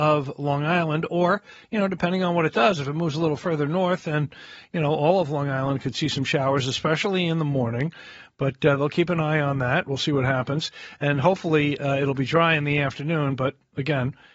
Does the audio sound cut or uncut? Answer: uncut